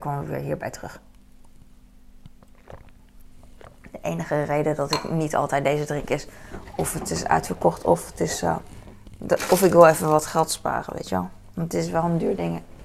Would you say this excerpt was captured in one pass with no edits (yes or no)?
yes